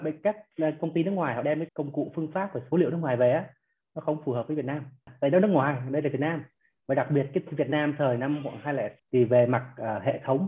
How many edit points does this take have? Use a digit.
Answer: 2